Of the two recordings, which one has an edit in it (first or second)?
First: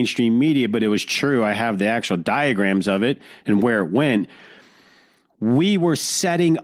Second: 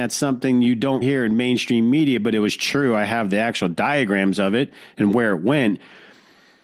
second